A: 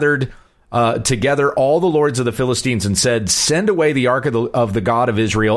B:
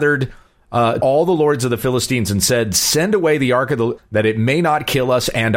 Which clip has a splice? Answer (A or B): B